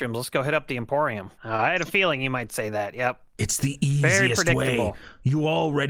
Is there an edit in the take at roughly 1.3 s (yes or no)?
yes